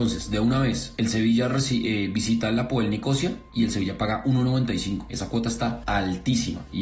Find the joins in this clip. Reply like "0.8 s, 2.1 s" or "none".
none